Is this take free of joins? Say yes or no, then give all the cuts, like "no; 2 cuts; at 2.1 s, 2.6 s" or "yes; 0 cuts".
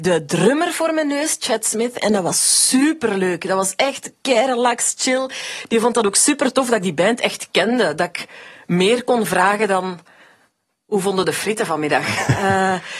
yes; 0 cuts